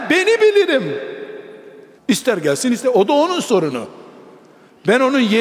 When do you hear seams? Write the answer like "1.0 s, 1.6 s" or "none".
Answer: 2.0 s